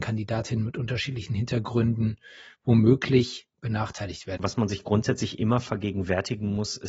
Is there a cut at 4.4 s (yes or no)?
yes